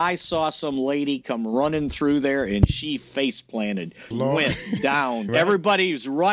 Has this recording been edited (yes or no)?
yes